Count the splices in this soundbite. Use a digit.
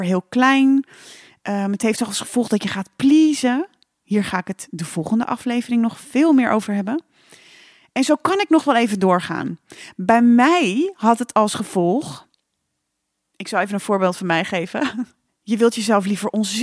1